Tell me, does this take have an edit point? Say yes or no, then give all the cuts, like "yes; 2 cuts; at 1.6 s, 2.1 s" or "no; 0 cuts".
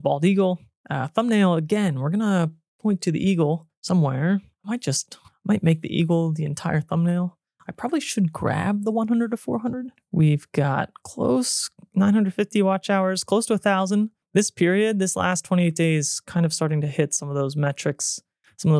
yes; 1 cut; at 10.0 s